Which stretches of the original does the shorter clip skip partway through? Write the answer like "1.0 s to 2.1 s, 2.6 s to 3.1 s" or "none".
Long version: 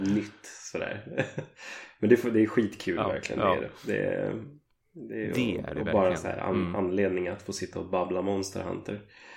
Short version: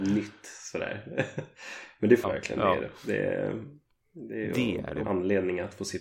2.2 s to 3.0 s, 5.8 s to 6.7 s